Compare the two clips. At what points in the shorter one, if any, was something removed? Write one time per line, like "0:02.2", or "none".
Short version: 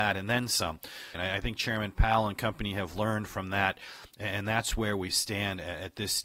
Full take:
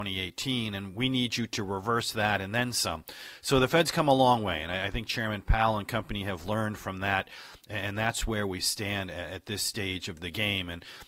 0:01.1